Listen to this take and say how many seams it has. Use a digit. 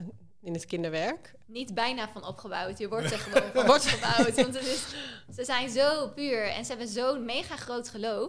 1